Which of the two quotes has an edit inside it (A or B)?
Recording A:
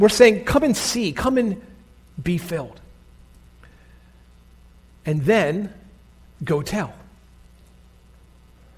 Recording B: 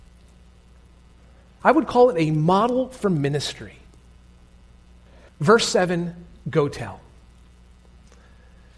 B